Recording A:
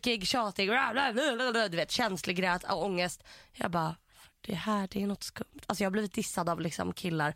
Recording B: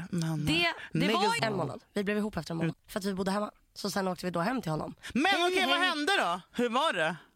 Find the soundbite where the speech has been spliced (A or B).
B